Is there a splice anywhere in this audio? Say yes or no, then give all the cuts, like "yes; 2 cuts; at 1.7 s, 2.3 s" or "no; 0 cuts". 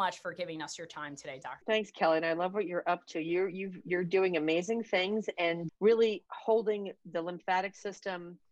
yes; 2 cuts; at 1.6 s, 5.7 s